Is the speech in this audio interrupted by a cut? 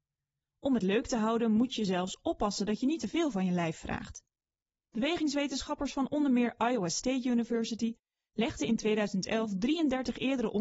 no; 0 cuts

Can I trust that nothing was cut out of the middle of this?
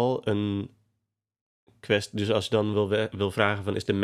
yes; 0 cuts

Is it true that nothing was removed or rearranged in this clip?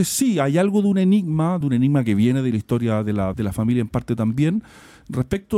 no; 2 cuts; at 1.6 s, 3.3 s

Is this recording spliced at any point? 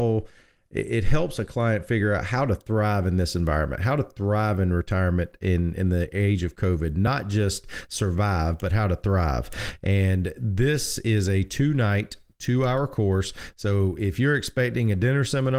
no; 0 cuts

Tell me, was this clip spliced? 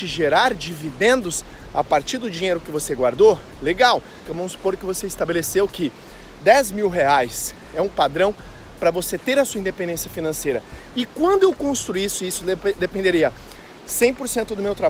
yes; 2 cuts; at 4.3 s, 10.9 s

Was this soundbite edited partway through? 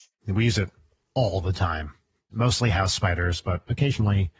no; 0 cuts

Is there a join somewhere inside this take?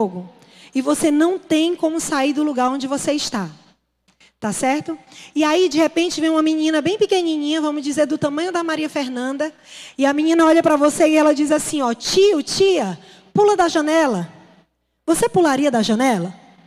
no; 0 cuts

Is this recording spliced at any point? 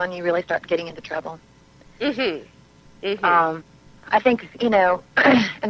no; 0 cuts

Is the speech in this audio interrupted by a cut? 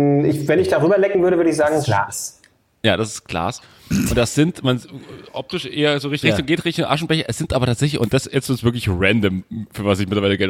yes; 1 cut; at 6.2 s

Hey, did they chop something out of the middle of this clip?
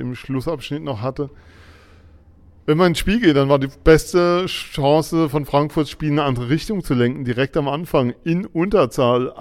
no; 0 cuts

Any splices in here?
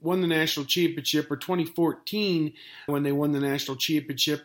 yes; 1 cut; at 2.9 s

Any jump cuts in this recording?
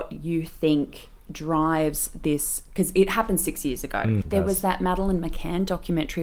yes; 1 cut; at 4.2 s

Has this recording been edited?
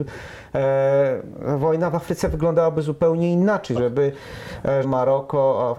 yes; 2 cuts; at 3.8 s, 4.8 s

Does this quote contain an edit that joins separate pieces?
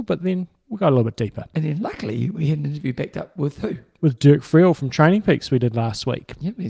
no; 0 cuts

